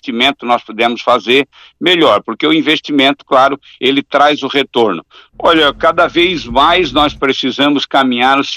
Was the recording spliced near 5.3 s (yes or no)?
yes